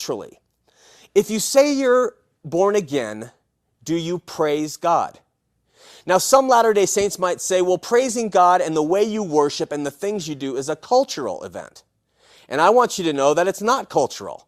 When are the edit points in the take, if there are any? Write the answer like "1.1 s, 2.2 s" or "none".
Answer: none